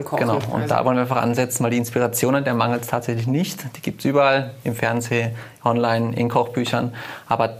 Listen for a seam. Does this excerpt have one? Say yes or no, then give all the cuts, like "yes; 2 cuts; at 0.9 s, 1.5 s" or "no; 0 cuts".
no; 0 cuts